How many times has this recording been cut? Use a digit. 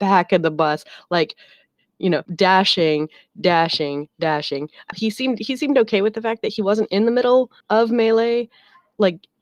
3